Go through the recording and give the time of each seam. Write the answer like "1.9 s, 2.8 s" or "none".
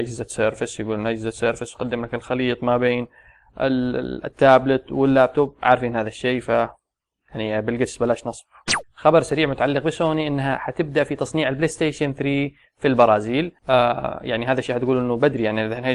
13.6 s